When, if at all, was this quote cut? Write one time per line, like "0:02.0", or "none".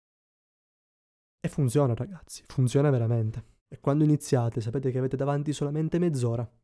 0:03.6